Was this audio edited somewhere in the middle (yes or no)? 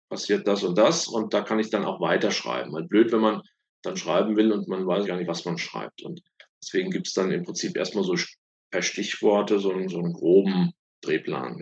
yes